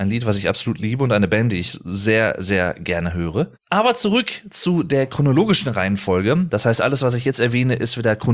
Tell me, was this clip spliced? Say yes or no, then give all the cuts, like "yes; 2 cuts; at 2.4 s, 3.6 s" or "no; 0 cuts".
no; 0 cuts